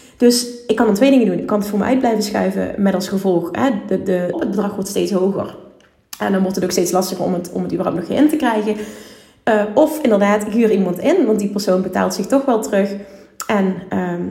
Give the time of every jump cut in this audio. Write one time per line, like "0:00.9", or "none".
0:04.3